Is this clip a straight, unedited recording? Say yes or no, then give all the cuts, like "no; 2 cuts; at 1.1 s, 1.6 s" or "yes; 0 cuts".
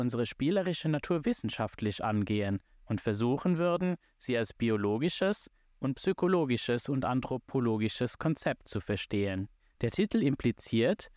no; 1 cut; at 9.7 s